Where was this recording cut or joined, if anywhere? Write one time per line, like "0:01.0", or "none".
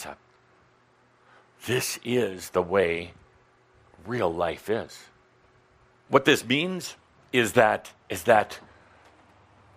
0:06.1
0:08.0